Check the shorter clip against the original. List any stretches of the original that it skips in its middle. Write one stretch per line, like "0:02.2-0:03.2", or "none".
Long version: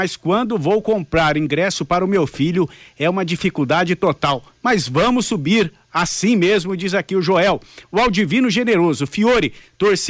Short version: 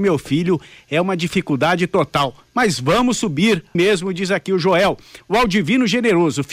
0:05.8-0:06.4